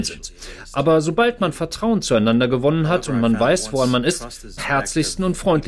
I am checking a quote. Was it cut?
yes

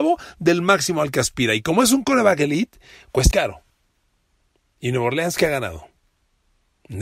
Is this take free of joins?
no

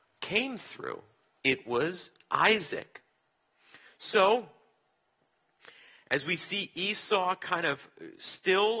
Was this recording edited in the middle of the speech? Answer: no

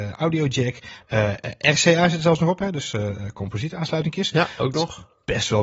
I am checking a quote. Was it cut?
no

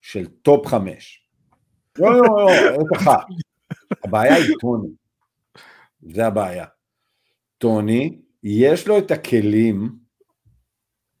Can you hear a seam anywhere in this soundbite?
yes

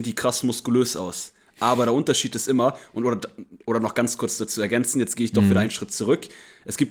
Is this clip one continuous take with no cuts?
yes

